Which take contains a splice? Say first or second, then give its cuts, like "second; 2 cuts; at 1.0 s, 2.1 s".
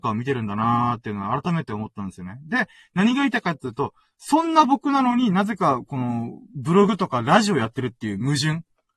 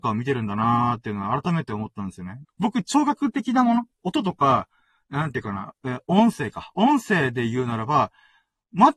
second; 1 cut; at 2.4 s